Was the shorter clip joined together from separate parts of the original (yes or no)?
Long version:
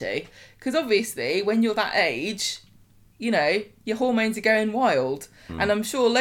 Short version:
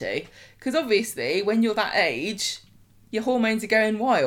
yes